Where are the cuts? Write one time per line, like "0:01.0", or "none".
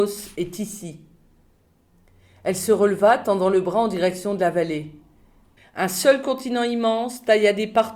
0:05.6